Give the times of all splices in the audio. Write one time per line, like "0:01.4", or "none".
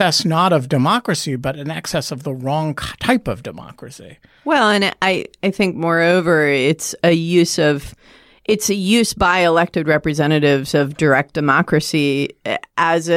none